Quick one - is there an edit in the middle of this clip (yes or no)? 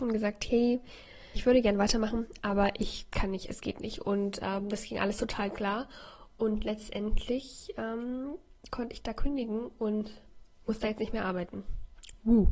yes